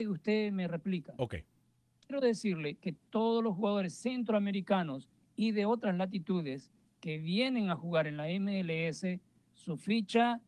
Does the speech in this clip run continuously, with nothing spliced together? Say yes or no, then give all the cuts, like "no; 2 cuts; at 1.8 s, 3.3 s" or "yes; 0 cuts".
no; 1 cut; at 2.0 s